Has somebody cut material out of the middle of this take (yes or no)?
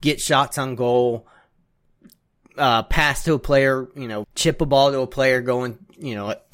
yes